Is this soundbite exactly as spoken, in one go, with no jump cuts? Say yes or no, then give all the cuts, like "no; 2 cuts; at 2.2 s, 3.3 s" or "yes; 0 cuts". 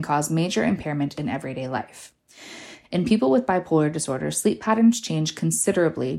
yes; 0 cuts